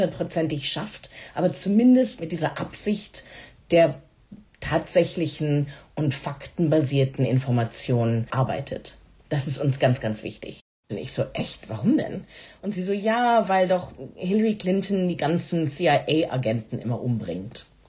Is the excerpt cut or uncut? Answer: cut